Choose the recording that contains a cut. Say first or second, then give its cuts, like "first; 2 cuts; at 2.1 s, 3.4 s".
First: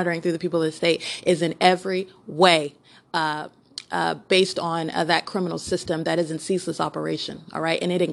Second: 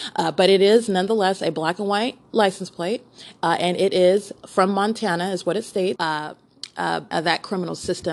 second; 2 cuts; at 6.0 s, 7.1 s